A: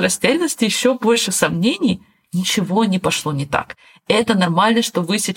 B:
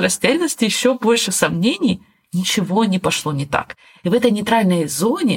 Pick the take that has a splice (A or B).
B